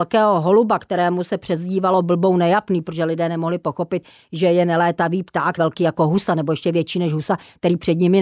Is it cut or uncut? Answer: cut